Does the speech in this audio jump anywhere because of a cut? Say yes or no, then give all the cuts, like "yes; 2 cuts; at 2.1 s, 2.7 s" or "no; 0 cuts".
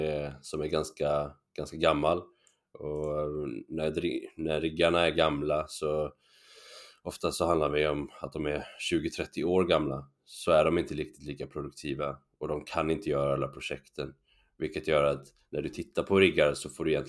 no; 0 cuts